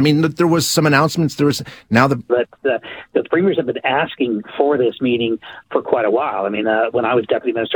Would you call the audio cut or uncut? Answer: cut